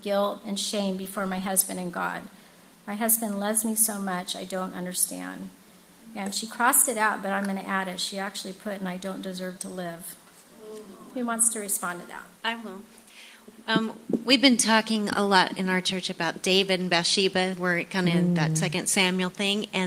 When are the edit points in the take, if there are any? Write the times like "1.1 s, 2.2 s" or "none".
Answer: 12.4 s